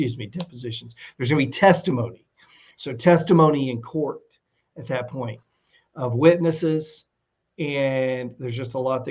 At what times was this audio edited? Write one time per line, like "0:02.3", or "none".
none